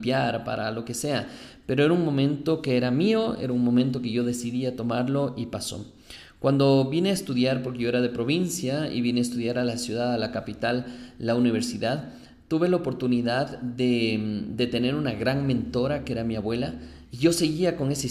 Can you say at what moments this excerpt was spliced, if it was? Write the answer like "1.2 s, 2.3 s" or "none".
17.0 s

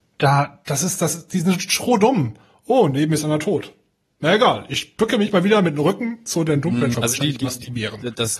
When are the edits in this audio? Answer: 6.9 s

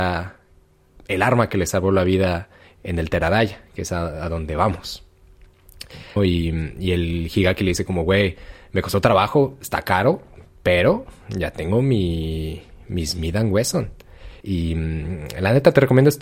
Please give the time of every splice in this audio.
6.2 s, 14.4 s

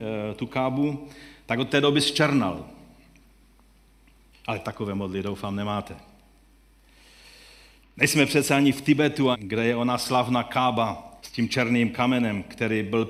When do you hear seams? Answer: 4.3 s, 9.3 s, 11.2 s

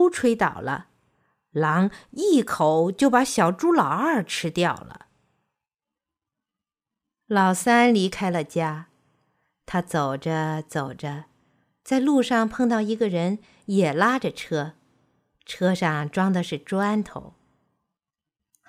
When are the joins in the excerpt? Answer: none

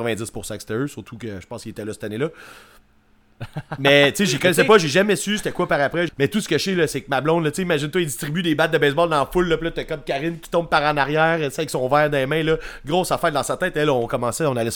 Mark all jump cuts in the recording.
6.1 s

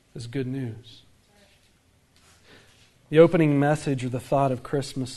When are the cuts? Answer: 2.9 s

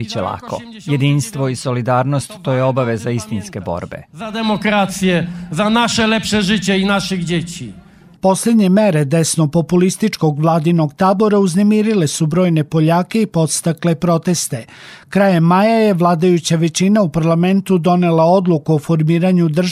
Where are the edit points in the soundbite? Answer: 4.1 s

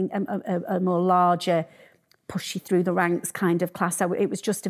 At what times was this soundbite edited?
none

